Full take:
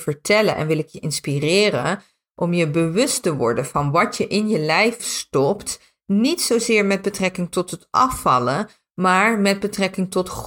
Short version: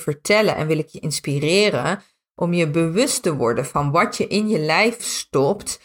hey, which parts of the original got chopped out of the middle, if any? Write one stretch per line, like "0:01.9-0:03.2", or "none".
none